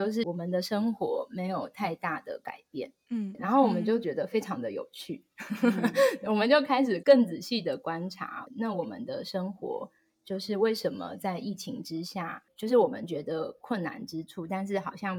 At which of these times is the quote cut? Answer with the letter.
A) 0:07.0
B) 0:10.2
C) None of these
A